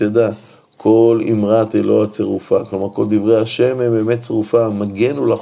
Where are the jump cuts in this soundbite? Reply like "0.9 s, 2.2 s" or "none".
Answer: none